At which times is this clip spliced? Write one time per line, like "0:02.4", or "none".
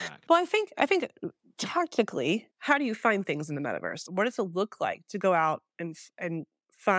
0:02.5